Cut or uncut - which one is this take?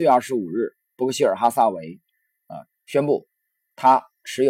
cut